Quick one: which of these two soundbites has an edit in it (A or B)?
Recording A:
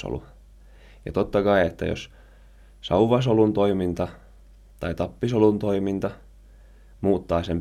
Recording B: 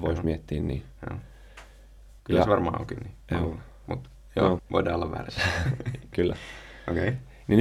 B